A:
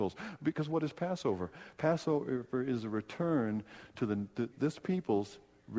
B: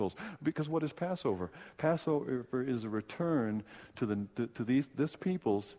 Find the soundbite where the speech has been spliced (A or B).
A